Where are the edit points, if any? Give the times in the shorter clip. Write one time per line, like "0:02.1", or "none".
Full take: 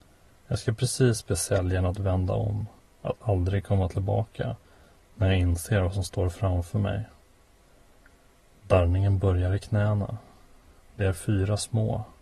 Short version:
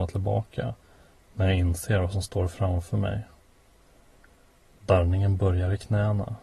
none